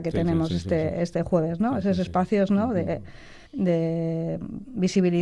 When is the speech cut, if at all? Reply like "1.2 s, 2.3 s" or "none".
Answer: 3.5 s